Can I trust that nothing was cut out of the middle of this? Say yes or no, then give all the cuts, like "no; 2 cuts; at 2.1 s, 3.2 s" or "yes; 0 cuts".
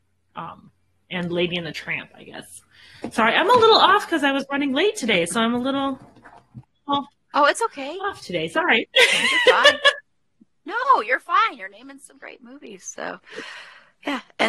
yes; 0 cuts